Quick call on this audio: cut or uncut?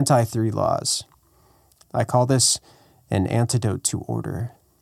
cut